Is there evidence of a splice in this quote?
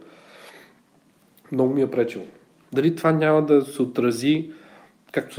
yes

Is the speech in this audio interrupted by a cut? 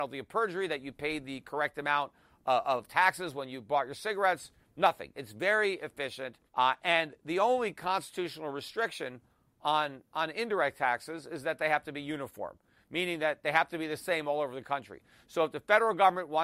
yes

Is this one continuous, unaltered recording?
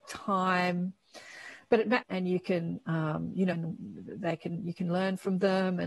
no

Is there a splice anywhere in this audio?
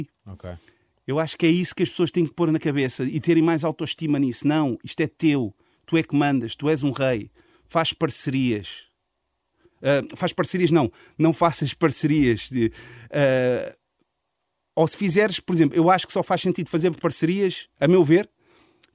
no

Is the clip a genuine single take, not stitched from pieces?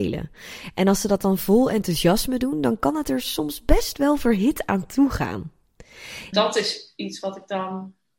no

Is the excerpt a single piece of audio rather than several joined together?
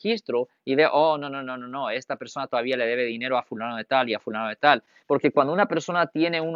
no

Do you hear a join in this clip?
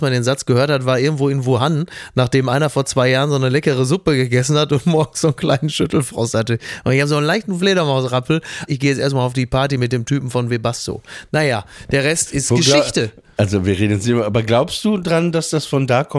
yes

